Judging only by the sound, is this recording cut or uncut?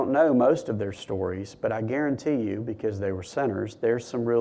uncut